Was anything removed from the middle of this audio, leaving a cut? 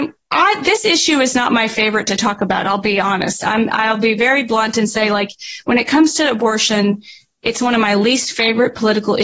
no; 0 cuts

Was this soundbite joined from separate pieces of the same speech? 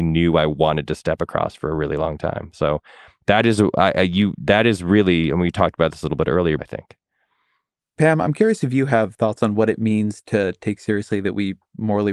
yes; 1 cut; at 6.6 s

